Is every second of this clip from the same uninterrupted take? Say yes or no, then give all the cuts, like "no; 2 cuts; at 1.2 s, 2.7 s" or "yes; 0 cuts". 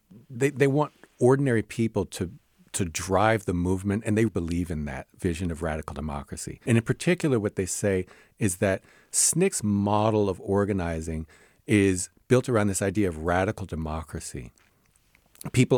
no; 2 cuts; at 4.3 s, 6.7 s